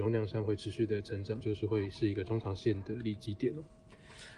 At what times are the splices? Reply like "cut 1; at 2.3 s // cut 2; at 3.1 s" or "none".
cut 1; at 1.4 s